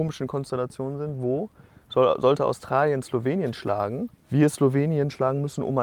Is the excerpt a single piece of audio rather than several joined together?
no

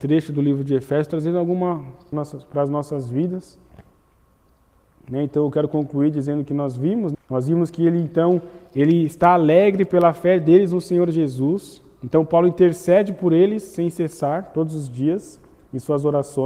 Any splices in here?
yes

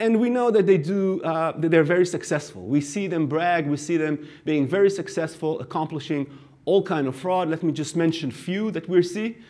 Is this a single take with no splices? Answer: yes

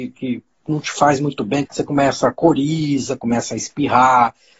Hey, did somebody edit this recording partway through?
yes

